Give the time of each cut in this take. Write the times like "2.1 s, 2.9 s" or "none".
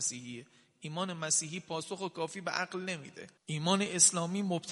3.4 s